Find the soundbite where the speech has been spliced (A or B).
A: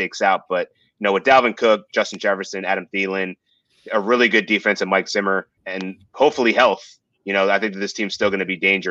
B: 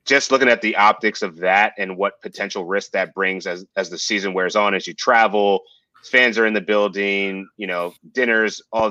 A